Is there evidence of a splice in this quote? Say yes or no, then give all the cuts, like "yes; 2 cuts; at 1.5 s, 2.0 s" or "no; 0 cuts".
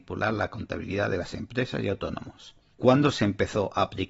no; 0 cuts